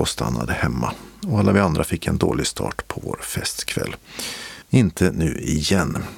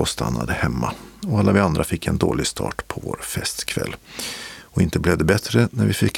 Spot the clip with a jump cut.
first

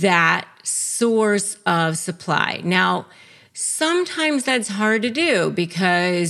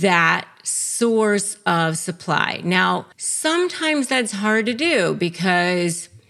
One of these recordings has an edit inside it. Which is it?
second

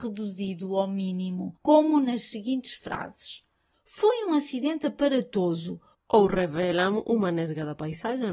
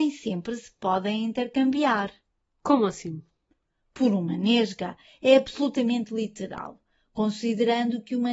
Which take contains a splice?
first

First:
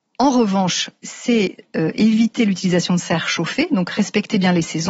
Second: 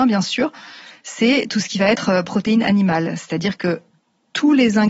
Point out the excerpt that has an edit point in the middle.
first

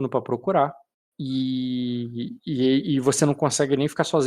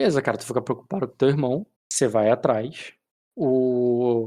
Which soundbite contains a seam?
second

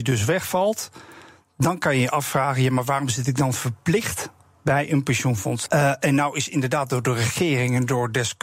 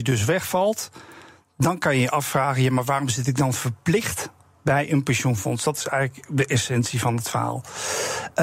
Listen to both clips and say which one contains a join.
first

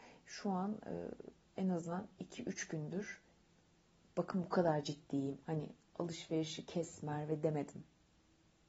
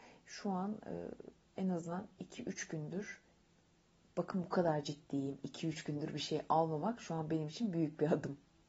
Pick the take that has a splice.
first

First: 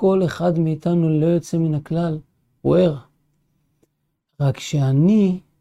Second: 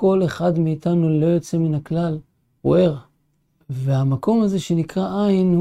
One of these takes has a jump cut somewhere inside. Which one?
second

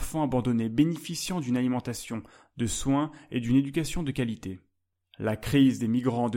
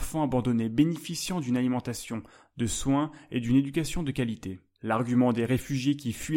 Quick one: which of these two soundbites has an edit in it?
second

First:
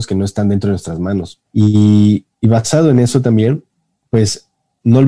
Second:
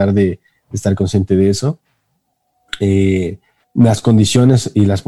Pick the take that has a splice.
first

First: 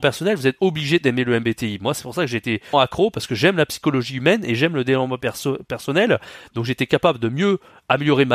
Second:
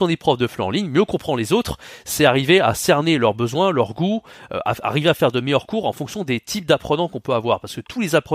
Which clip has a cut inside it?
first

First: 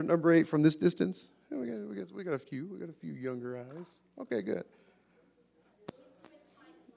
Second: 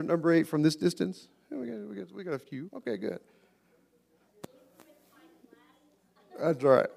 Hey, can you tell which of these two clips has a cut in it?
second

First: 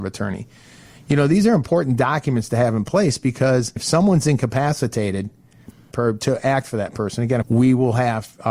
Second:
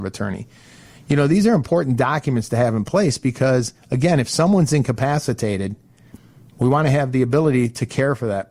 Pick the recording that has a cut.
first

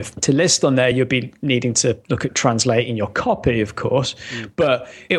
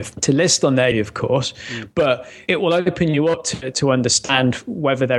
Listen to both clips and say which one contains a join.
second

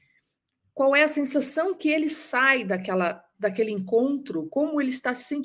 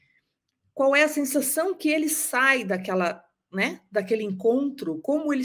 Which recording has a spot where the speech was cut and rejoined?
first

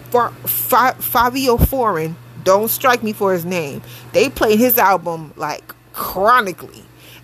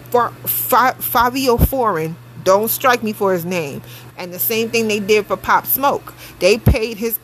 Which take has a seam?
second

